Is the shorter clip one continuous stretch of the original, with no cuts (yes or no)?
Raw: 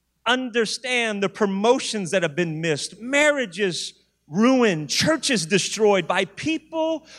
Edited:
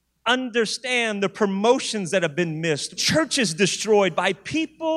no